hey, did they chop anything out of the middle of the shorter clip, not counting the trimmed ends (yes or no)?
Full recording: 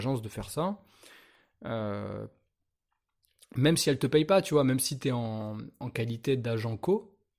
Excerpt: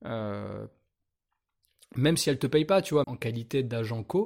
yes